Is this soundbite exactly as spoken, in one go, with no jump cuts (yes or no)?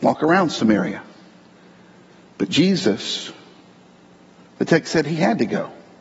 yes